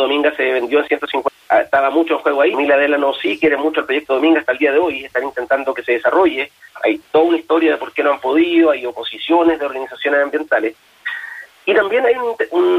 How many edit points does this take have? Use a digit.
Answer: 0